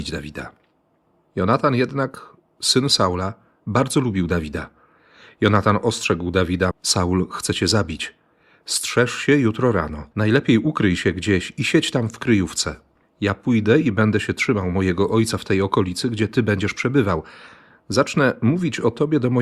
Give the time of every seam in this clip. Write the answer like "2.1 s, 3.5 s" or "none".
6.7 s, 10.1 s